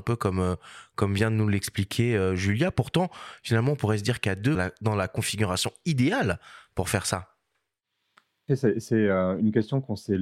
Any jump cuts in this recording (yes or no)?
yes